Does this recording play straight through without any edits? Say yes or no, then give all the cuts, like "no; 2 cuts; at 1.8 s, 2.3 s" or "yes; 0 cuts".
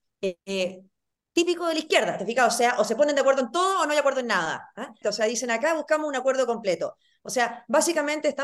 no; 1 cut; at 5.0 s